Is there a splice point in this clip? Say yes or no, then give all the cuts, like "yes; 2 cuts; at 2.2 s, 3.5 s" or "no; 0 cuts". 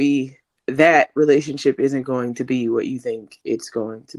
no; 0 cuts